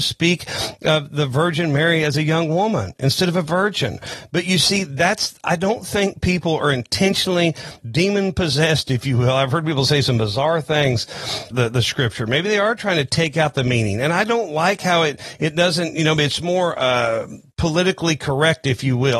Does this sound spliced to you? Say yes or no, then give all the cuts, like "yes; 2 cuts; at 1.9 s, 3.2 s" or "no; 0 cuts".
yes; 2 cuts; at 7.8 s, 11.5 s